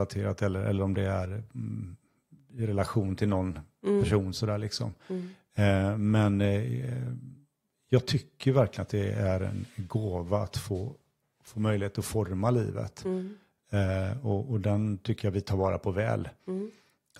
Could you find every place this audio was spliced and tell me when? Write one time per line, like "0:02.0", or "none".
none